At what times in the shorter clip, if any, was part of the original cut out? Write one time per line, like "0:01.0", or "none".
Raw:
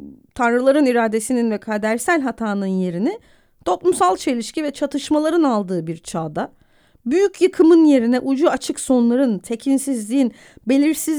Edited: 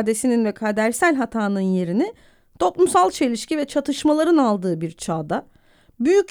none